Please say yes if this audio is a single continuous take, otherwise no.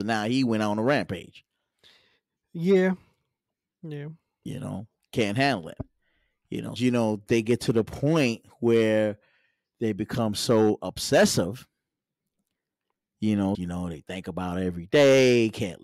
no